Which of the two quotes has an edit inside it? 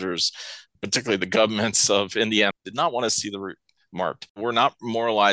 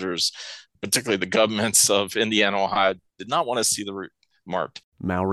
first; 2 cuts; at 2.5 s, 4.3 s

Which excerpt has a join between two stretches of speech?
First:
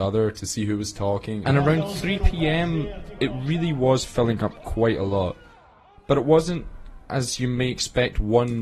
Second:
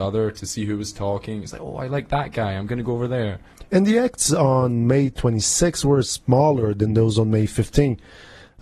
first; 1 cut; at 1.4 s

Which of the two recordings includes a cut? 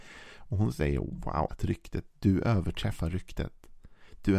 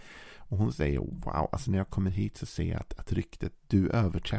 first; 1 cut; at 1.5 s

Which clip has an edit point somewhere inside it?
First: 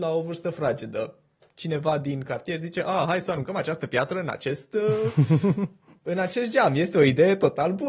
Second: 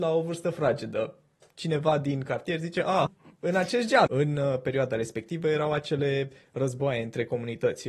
second; 2 cuts; at 3.1 s, 4.1 s

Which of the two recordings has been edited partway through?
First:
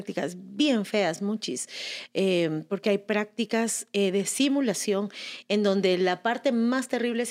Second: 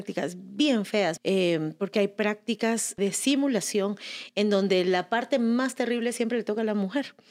second; 2 cuts; at 1.2 s, 3.0 s

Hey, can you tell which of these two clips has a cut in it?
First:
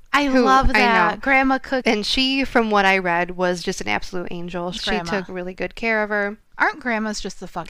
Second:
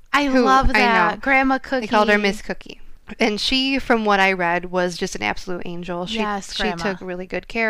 first; 2 cuts; at 1.8 s, 4.8 s

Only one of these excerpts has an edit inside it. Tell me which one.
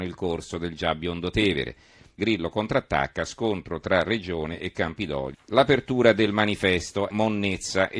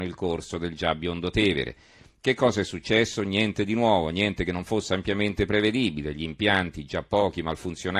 first; 3 cuts; at 2.2 s, 5.3 s, 7.1 s

